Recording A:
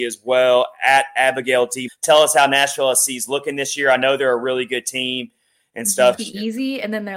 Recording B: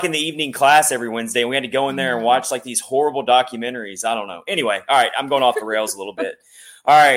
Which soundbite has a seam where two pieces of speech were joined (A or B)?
A